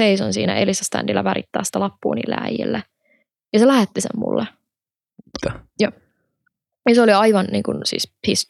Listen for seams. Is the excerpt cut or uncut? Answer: cut